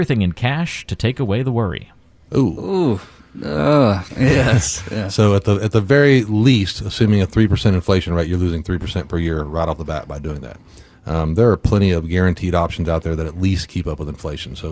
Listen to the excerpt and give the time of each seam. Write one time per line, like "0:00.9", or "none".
0:04.1